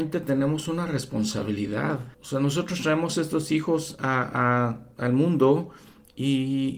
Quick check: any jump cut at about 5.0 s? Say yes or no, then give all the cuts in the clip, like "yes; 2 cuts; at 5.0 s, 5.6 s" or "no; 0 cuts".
no; 1 cut; at 2.1 s